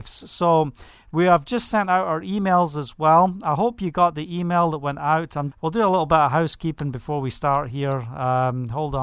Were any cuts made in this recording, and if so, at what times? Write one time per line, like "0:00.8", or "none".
0:05.5